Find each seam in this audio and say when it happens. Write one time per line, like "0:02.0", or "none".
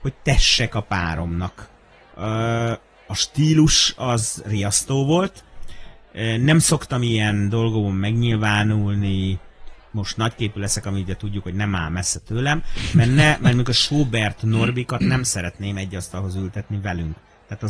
0:02.1

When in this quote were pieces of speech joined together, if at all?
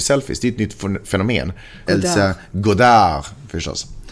0:01.9

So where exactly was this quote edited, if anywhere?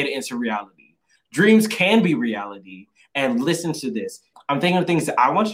0:04.3

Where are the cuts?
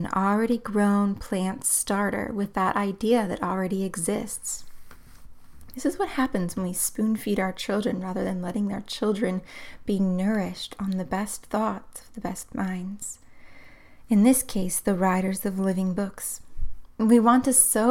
none

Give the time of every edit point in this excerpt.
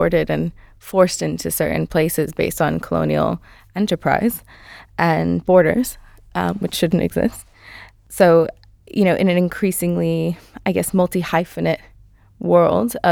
none

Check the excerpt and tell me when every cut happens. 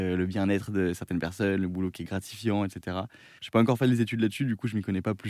0:03.4

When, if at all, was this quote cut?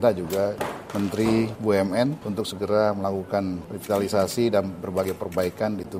none

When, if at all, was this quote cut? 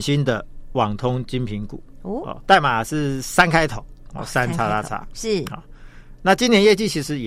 0:02.4

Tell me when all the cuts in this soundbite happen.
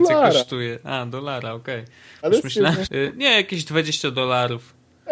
0:02.9

